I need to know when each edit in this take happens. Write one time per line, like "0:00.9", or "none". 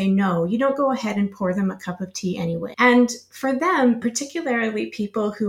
0:02.7
0:04.0